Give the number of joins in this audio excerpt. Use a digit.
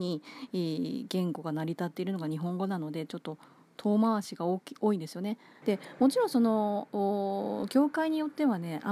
1